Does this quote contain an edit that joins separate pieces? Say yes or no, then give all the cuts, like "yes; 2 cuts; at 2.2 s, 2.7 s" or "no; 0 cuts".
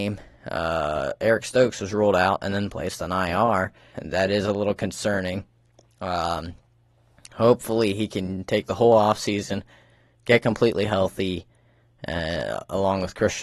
yes; 1 cut; at 3.9 s